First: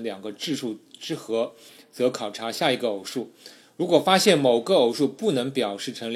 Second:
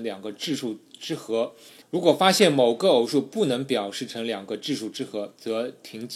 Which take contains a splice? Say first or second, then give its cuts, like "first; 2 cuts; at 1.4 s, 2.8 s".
second; 1 cut; at 1.8 s